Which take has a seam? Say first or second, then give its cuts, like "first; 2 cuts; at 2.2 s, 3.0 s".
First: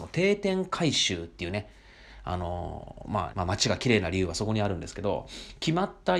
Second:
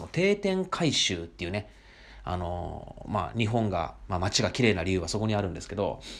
first; 1 cut; at 3.3 s